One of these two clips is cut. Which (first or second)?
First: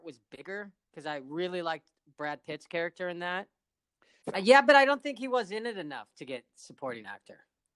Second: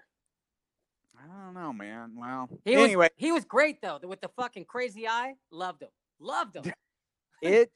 first